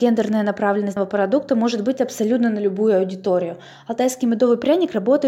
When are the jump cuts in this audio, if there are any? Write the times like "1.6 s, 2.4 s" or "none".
1.0 s